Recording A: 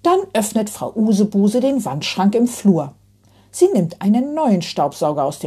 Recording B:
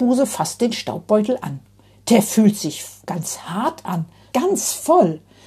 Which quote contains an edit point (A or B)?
B